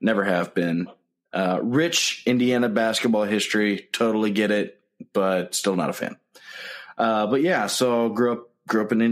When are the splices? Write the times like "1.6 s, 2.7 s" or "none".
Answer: none